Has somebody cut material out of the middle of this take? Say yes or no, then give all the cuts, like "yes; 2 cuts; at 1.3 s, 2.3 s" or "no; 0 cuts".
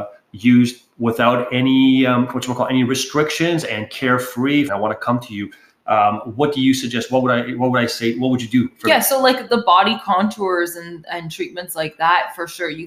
yes; 2 cuts; at 4.7 s, 9.5 s